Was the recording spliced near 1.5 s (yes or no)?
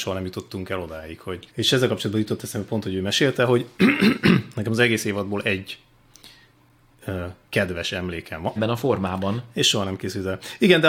yes